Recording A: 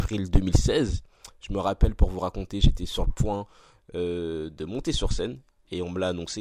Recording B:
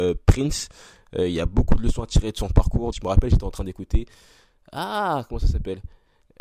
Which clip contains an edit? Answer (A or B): B